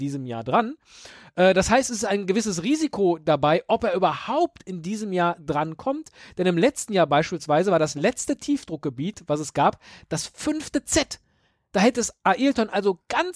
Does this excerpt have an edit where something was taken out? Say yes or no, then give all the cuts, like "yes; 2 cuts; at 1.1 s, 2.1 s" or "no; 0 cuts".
no; 0 cuts